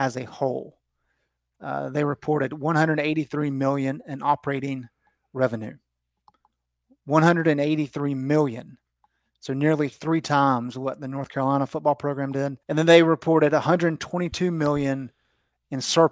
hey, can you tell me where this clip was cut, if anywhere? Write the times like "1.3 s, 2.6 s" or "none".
12.6 s